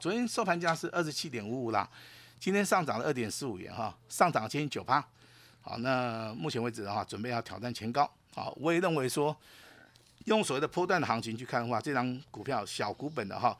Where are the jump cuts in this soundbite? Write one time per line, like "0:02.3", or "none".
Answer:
none